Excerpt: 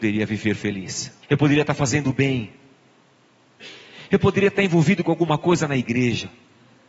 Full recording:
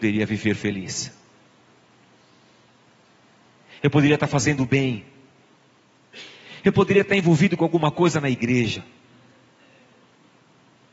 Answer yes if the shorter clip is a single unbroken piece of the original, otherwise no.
no